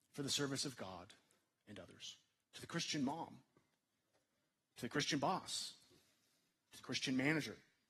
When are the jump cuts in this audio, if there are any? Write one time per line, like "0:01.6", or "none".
0:02.4